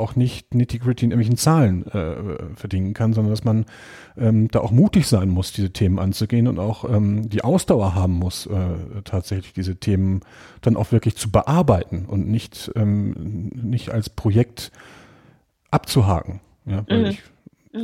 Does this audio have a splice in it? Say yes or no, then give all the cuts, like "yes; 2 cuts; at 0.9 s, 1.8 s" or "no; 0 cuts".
no; 0 cuts